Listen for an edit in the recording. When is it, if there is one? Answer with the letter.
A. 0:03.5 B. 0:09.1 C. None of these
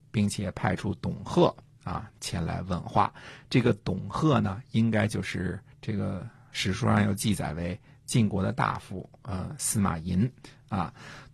C